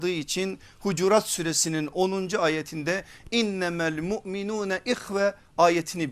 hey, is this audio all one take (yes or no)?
yes